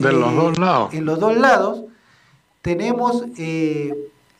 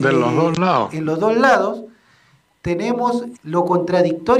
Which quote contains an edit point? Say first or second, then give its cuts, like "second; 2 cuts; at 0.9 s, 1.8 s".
second; 1 cut; at 3.4 s